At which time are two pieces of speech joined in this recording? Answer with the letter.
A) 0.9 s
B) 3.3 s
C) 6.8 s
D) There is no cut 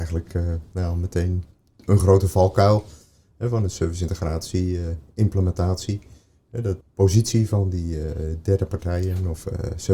C